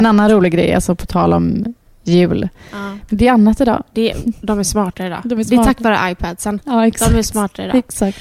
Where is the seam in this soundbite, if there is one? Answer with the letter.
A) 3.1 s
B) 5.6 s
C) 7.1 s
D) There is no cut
A